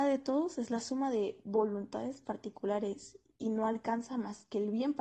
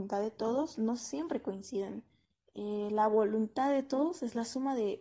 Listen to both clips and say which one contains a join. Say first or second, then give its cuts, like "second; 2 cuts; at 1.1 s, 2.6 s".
second; 1 cut; at 2.3 s